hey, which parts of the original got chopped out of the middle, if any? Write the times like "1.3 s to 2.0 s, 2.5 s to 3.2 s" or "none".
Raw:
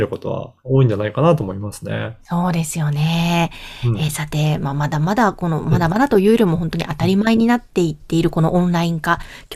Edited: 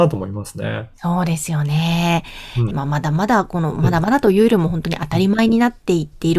4.0 s to 4.6 s